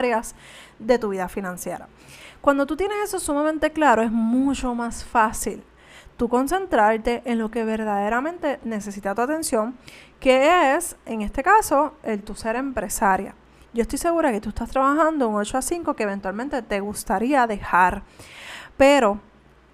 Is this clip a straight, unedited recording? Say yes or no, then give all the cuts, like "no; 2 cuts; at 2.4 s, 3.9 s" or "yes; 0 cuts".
yes; 0 cuts